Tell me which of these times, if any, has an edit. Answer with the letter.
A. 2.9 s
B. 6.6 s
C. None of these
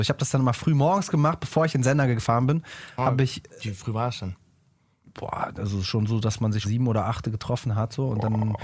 B